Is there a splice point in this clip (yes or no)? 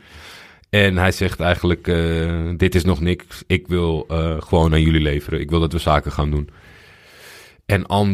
no